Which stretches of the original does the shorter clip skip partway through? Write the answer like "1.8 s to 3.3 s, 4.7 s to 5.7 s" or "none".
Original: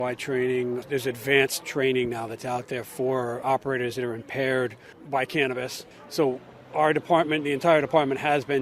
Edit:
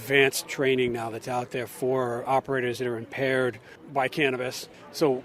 none